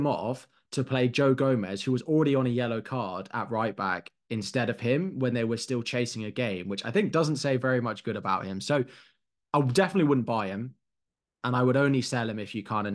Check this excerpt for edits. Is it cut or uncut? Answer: uncut